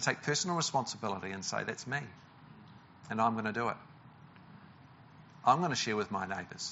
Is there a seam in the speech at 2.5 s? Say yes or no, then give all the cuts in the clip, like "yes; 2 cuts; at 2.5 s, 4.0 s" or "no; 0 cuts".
no; 0 cuts